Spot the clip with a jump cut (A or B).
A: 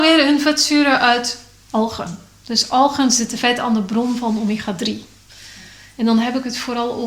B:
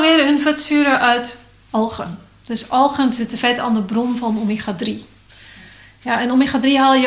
A